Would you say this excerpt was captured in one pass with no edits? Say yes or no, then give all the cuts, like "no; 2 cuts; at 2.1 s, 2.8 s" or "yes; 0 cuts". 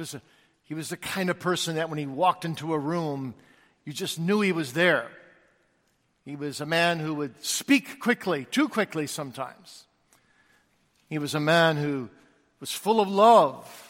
yes; 0 cuts